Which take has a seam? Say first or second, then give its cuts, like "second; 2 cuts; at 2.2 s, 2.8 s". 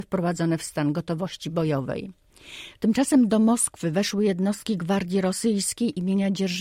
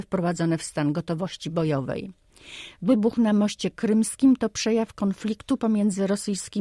first; 1 cut; at 2.7 s